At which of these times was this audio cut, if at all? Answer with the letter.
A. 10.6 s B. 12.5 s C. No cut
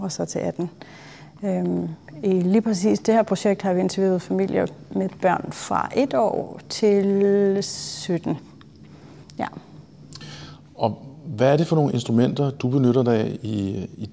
C